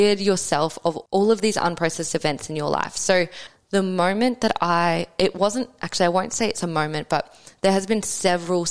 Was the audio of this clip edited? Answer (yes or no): no